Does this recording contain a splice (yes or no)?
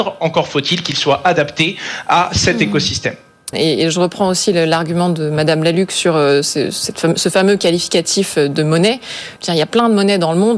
yes